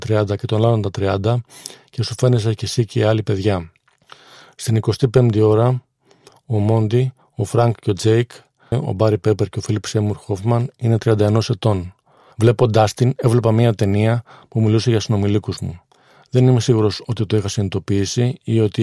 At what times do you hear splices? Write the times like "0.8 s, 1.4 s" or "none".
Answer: 8.7 s, 12.3 s